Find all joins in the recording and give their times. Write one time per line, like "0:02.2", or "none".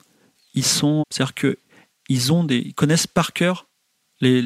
0:01.0